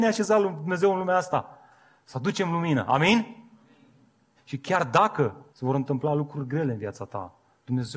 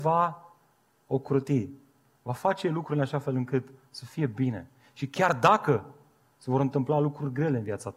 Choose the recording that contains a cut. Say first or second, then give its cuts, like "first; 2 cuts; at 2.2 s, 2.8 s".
first; 2 cuts; at 4.4 s, 5.5 s